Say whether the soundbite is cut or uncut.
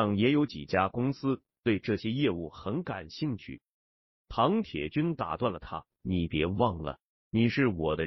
cut